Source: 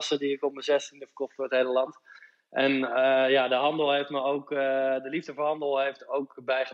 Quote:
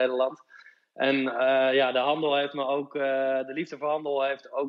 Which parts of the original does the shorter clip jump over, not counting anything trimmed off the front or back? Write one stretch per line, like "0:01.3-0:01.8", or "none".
none